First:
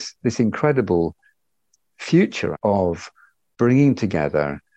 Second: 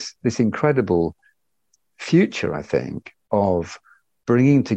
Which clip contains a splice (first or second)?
first